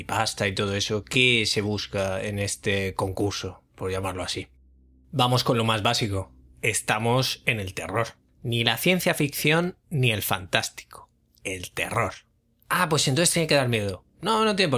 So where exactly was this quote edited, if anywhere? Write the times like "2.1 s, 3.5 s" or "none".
none